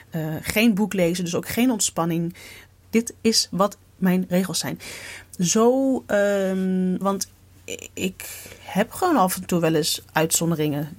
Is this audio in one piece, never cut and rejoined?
no; 2 cuts; at 2.8 s, 7.0 s

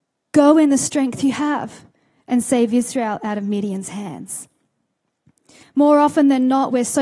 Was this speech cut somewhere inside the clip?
yes; 1 cut; at 5.6 s

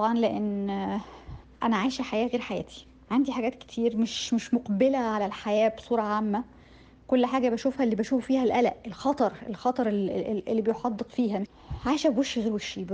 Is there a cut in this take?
no; 0 cuts

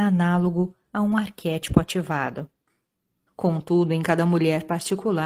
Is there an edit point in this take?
yes; 1 cut; at 3.3 s

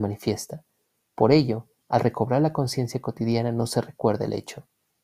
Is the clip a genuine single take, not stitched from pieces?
yes; 0 cuts

